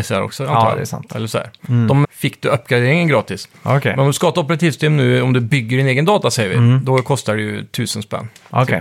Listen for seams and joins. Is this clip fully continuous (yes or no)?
no